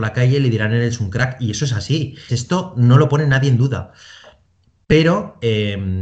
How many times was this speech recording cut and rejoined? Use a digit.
1